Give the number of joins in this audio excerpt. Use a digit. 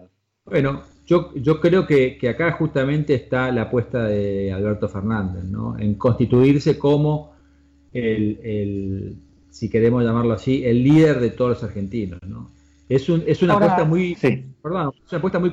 1